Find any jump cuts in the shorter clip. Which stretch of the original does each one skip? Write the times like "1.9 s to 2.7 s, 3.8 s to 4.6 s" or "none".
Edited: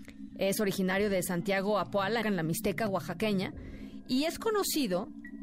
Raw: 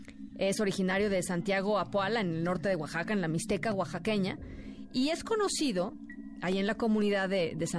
2.2 s to 3.1 s